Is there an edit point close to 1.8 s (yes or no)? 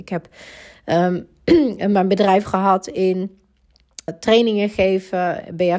no